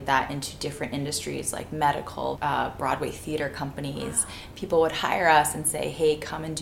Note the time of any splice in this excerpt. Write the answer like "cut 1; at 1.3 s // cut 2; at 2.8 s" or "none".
cut 1; at 2.4 s